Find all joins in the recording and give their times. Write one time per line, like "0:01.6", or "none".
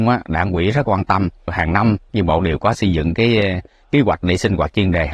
none